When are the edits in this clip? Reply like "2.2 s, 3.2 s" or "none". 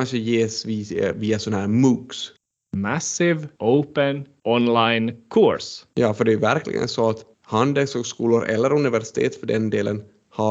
5.9 s